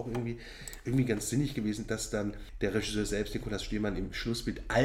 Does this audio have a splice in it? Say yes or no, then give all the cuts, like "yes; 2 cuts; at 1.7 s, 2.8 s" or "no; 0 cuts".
no; 0 cuts